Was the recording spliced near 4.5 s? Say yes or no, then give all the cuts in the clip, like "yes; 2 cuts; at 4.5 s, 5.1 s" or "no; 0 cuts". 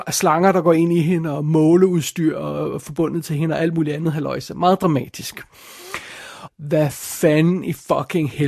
no; 1 cut; at 6.5 s